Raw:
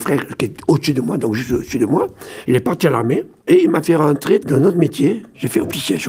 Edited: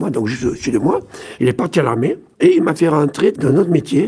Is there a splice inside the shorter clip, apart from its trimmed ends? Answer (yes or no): no